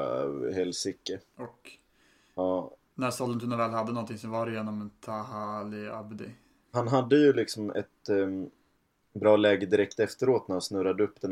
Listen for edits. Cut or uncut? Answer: cut